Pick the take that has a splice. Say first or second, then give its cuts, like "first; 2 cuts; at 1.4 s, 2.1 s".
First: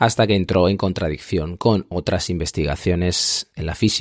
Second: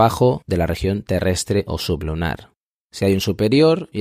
second; 1 cut; at 2.8 s